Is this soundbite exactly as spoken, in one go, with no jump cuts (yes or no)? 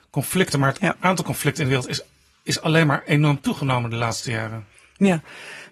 yes